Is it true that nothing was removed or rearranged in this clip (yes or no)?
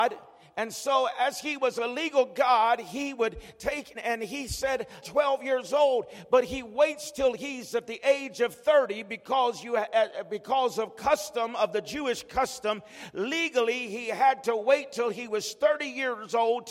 no